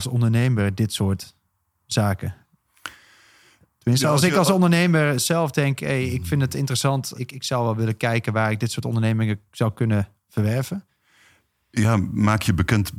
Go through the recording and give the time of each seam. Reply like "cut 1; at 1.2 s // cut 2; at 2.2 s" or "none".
cut 1; at 7.1 s